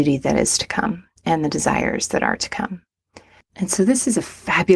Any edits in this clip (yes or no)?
yes